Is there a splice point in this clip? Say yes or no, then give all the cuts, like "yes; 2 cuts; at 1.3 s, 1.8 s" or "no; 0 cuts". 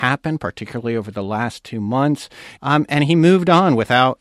yes; 1 cut; at 2.6 s